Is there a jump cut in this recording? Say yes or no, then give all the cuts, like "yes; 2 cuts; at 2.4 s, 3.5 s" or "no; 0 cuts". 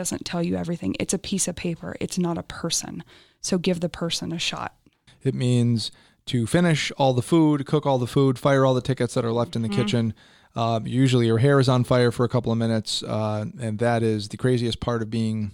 yes; 1 cut; at 5.1 s